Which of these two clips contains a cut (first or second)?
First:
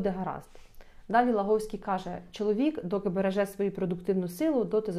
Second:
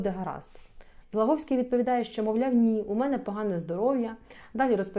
second